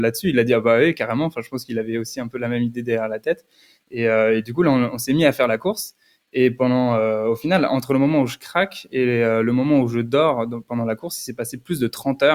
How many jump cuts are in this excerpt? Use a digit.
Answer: 0